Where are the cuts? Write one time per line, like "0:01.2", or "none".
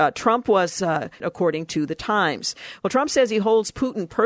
0:01.2